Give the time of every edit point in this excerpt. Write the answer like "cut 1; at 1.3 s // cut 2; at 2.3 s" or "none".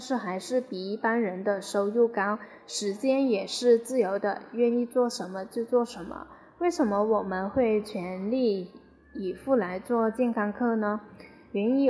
none

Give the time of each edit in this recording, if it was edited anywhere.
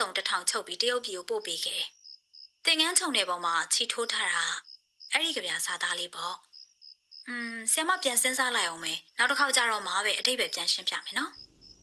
cut 1; at 5.1 s // cut 2; at 9.1 s

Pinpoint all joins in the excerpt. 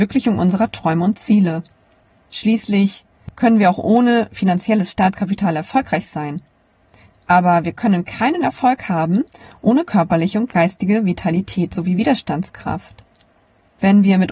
cut 1; at 2.1 s

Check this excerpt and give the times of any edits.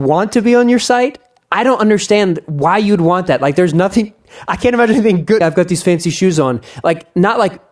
cut 1; at 5.4 s

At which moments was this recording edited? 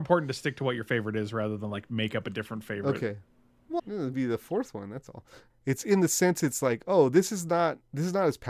cut 1; at 3.8 s // cut 2; at 5.5 s

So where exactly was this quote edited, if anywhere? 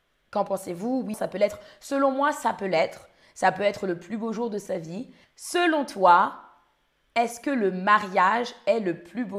cut 1; at 1.1 s // cut 2; at 5.2 s

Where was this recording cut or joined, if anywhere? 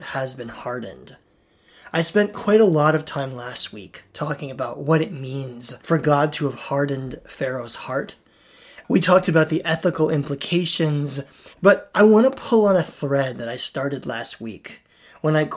cut 1; at 5.8 s // cut 2; at 11.5 s

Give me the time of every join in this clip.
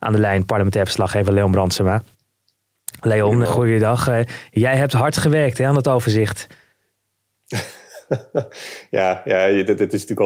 cut 1; at 3.5 s

